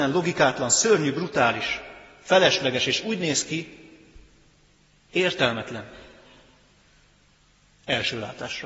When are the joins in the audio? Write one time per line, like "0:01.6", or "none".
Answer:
none